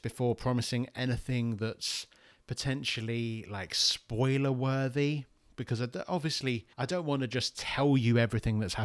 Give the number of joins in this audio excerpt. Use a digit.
1